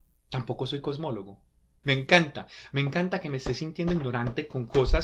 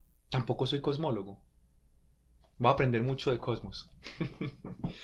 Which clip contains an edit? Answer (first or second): first